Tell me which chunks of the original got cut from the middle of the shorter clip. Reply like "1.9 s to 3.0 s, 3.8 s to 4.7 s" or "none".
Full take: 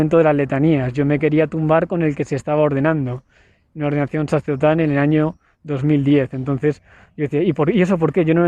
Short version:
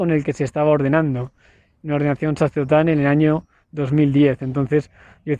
none